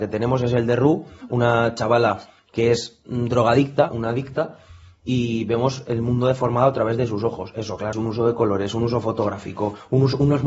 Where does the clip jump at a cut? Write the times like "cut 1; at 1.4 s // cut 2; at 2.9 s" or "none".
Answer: cut 1; at 3.9 s // cut 2; at 7.9 s